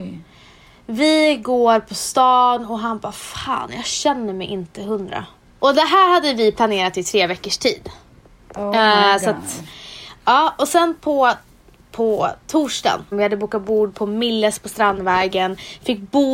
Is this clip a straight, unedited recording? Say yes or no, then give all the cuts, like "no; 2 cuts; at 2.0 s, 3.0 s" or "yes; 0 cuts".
no; 2 cuts; at 5.6 s, 13.1 s